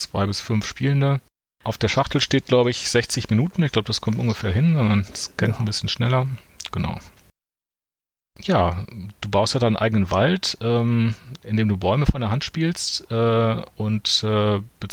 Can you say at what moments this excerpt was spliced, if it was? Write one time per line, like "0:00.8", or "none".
none